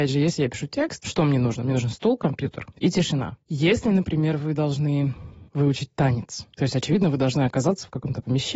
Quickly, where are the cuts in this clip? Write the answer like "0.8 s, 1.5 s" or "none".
none